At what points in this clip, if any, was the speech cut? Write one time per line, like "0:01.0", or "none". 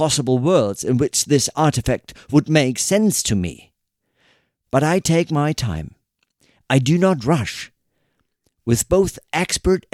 none